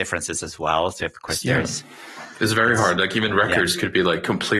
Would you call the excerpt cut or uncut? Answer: uncut